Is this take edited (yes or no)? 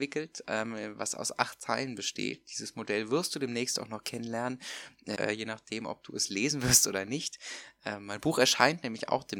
yes